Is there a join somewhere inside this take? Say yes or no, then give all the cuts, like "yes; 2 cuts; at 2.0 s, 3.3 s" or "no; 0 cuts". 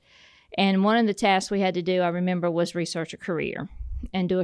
no; 0 cuts